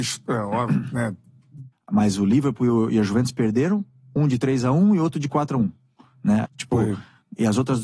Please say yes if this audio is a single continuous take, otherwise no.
no